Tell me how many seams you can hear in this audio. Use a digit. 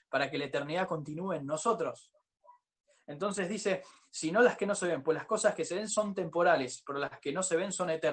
0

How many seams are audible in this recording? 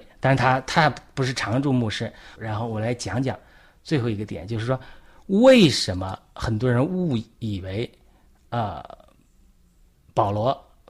1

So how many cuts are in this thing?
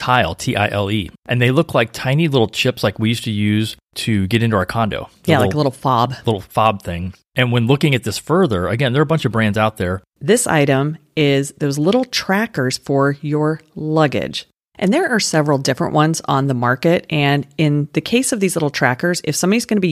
1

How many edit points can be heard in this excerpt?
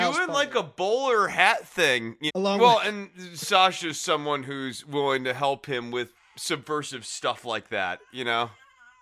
2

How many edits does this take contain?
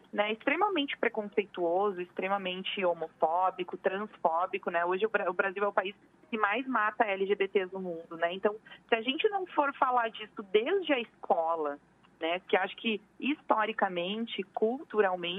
1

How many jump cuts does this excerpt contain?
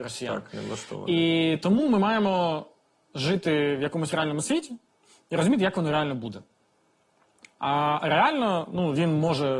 0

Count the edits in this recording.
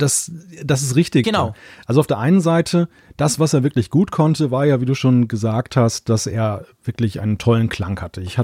1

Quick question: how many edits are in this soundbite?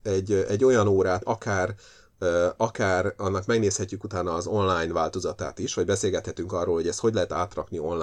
1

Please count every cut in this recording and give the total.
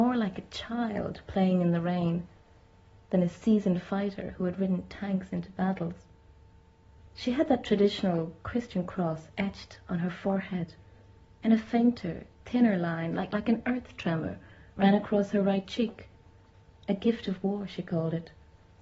1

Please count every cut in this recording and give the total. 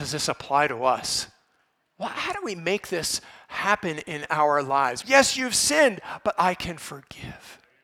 1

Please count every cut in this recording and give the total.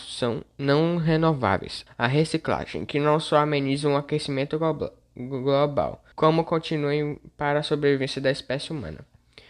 2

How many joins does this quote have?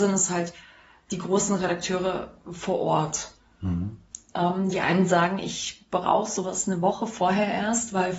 1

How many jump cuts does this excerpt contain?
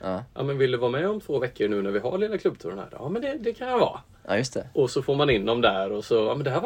0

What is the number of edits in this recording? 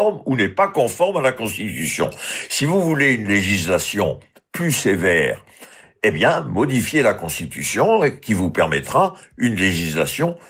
0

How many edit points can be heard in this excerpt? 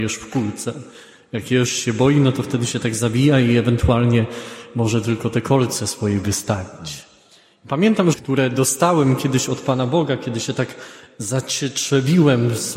1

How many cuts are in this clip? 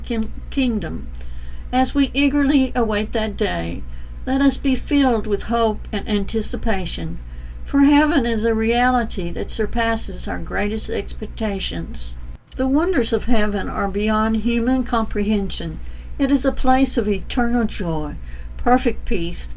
1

